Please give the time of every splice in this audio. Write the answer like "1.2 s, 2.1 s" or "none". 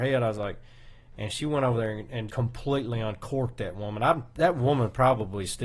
2.3 s